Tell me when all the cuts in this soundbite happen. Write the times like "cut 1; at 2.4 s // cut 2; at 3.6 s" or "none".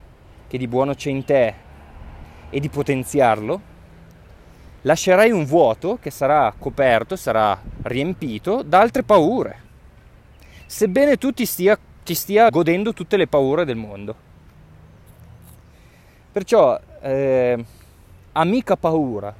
cut 1; at 4.8 s // cut 2; at 12.5 s